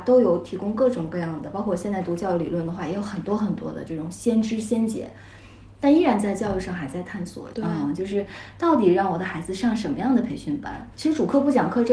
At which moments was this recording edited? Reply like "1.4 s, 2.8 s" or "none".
7.5 s, 10.9 s